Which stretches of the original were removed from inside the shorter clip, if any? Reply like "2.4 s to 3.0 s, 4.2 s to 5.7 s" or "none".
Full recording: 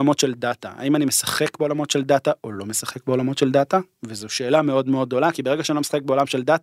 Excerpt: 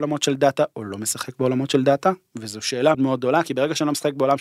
4.6 s to 4.8 s